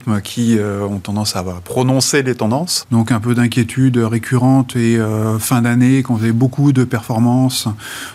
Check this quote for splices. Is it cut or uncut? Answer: cut